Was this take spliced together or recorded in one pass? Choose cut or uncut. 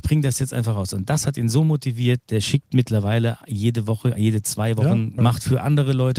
cut